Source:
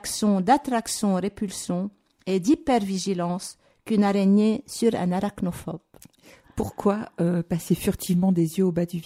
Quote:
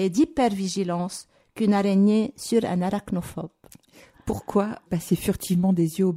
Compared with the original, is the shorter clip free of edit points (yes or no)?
no